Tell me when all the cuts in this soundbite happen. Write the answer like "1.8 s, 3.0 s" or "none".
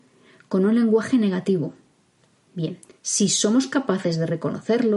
2.9 s